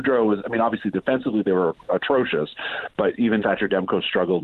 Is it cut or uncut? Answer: cut